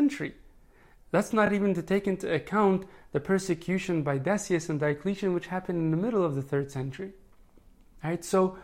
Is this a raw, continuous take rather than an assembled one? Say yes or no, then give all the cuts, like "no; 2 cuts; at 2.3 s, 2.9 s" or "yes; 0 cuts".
yes; 0 cuts